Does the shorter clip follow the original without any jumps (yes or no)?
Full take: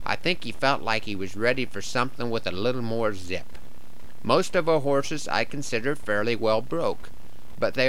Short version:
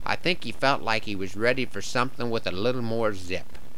yes